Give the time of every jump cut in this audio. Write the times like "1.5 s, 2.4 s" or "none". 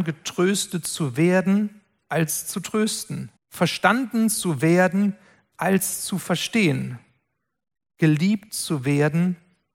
3.4 s

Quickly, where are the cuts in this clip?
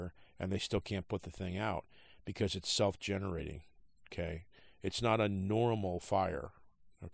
none

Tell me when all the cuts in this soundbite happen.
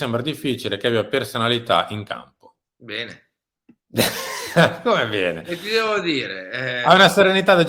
2.7 s

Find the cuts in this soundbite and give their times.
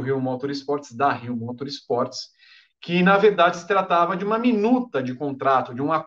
none

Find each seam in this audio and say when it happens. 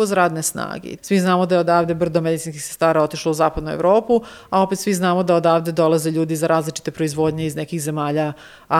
1.0 s

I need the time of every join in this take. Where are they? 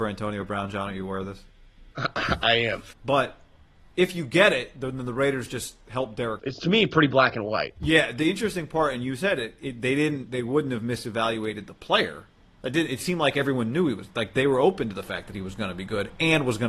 2.9 s, 6.4 s

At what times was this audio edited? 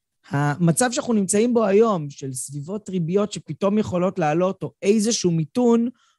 none

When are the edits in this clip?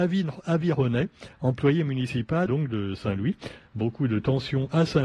2.5 s, 3.6 s

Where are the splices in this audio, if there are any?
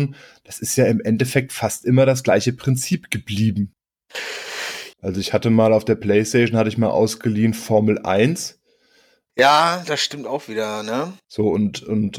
4.9 s, 9.3 s

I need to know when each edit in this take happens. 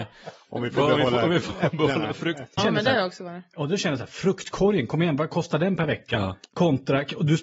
2.6 s

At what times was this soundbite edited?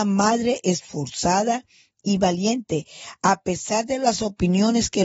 2.2 s

